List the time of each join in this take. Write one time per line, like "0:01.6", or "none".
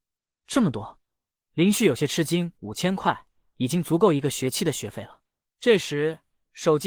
0:02.6
0:05.4